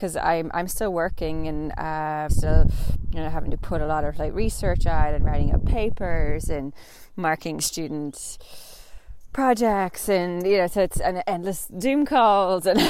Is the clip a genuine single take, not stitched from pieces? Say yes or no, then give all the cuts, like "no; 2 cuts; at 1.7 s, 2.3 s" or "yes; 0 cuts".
no; 1 cut; at 2.3 s